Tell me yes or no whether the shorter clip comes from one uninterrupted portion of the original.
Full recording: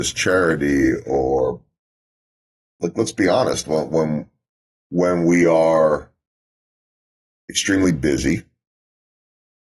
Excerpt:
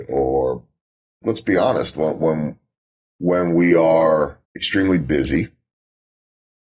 no